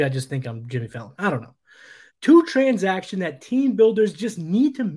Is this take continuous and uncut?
no; 1 cut; at 2.1 s

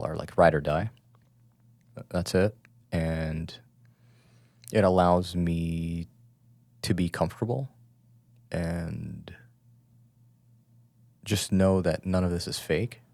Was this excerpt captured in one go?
yes; 0 cuts

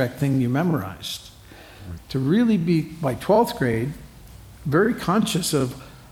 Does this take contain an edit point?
yes; 1 cut; at 2.0 s

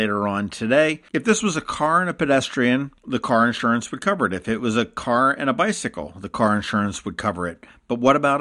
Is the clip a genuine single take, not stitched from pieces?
no; 1 cut; at 1.0 s

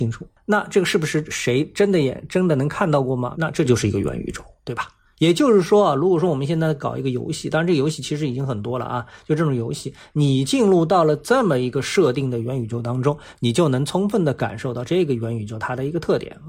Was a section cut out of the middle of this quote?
yes; 1 cut; at 3.3 s

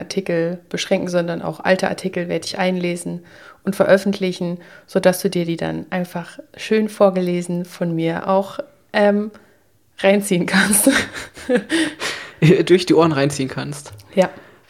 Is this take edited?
no; 0 cuts

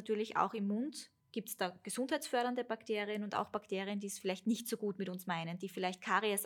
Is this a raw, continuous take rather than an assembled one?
no; 1 cut; at 1.2 s

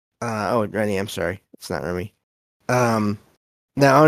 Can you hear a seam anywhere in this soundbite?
yes; 1 cut; at 2.6 s

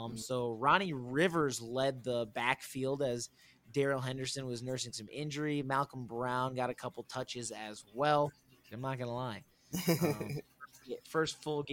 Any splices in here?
yes; 1 cut; at 8.7 s

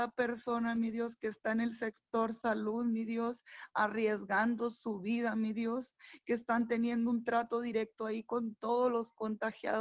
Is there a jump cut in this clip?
no; 0 cuts

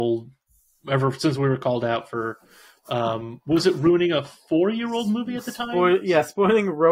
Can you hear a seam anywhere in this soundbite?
no; 0 cuts

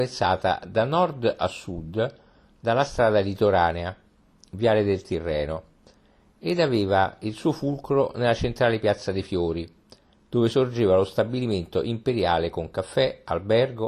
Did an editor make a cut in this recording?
no; 0 cuts

